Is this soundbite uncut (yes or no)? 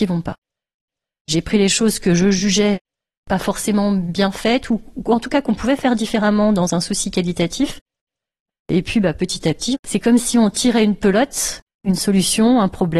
yes